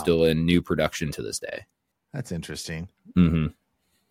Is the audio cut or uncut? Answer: cut